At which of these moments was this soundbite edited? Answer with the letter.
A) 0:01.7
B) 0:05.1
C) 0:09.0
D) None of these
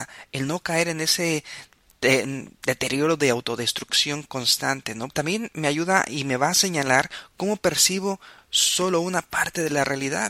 B